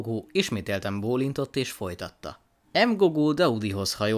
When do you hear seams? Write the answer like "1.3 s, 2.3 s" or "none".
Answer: 2.6 s